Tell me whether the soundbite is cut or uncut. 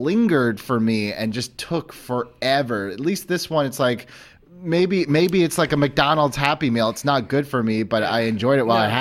uncut